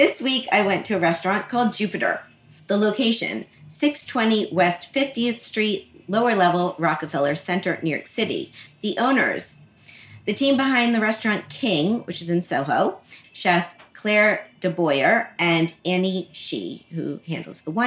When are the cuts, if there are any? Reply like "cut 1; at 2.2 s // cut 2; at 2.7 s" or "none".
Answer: cut 1; at 2.6 s // cut 2; at 8.7 s // cut 3; at 13.2 s

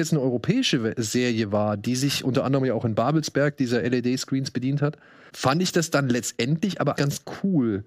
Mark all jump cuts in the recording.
cut 1; at 5.3 s // cut 2; at 7.0 s

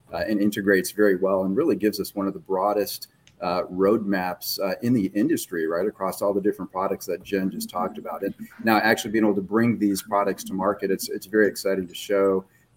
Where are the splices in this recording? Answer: none

